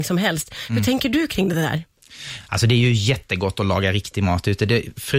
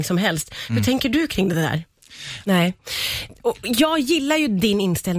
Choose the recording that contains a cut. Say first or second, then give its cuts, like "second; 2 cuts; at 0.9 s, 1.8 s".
second; 1 cut; at 2.4 s